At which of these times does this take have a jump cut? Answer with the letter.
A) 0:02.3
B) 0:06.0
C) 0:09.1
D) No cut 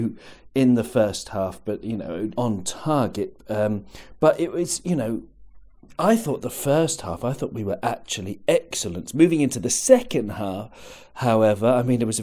A